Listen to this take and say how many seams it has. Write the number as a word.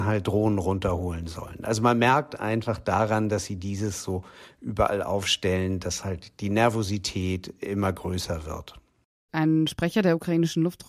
one